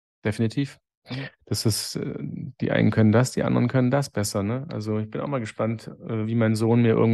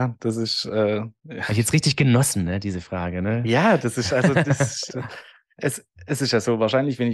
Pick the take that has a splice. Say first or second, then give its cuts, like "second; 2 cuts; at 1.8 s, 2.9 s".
second; 1 cut; at 4.9 s